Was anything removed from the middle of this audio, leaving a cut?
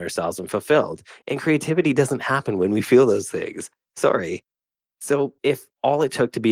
no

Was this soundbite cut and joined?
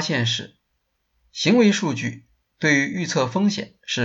no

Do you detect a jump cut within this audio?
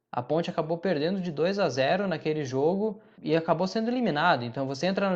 yes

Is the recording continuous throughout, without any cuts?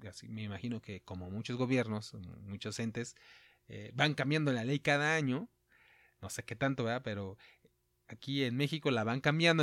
yes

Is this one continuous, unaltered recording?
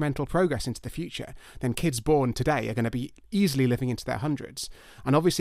yes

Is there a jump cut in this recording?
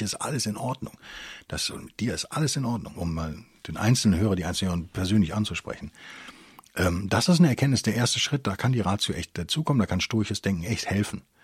yes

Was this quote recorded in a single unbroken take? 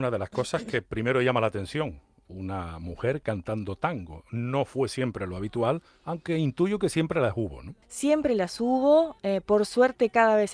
no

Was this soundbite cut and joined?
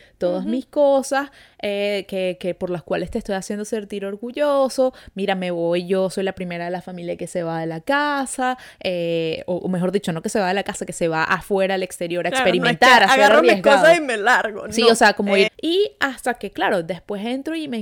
yes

